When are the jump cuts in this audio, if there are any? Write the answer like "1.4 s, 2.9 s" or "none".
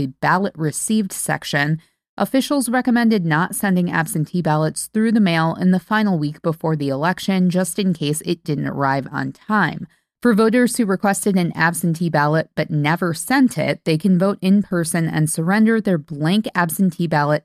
10.2 s

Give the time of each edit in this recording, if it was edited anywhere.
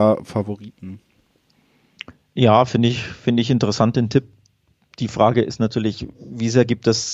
none

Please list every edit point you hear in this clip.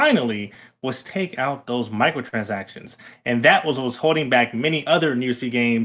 none

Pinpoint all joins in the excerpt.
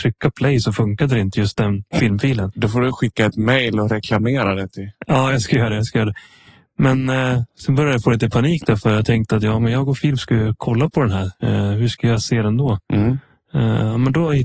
2.5 s

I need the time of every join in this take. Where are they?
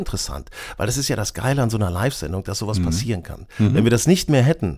none

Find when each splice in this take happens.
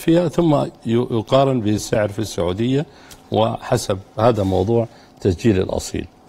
none

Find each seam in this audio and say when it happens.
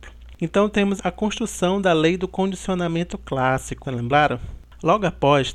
1.0 s, 3.8 s

